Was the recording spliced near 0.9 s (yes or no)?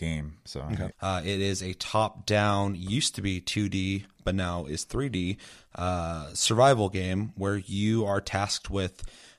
yes